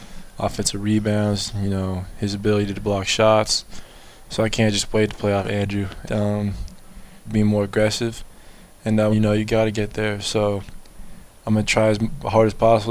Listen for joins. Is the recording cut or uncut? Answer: cut